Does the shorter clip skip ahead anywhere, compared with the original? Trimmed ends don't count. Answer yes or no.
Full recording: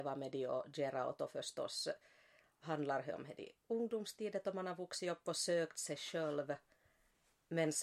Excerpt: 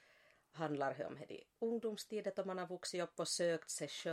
no